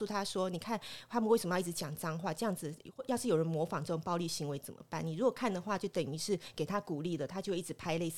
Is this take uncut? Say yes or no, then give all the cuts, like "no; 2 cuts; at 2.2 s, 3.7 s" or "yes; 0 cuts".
yes; 0 cuts